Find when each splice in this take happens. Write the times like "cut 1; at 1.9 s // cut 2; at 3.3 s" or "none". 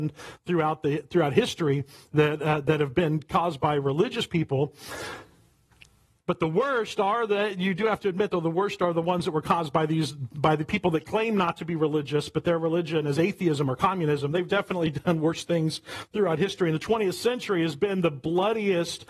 none